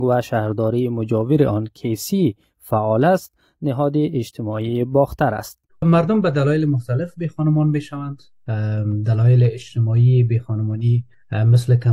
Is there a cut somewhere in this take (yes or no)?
yes